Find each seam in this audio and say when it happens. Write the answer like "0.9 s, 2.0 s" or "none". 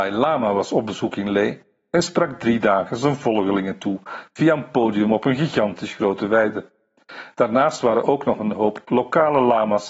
8.0 s